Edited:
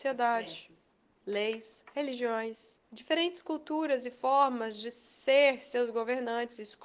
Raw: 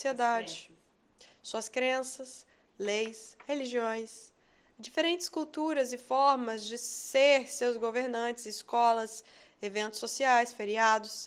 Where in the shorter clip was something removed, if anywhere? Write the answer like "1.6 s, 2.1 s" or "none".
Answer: 1.2 s, 2.8 s